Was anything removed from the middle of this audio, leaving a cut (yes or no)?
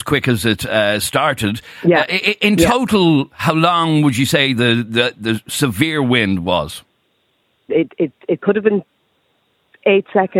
yes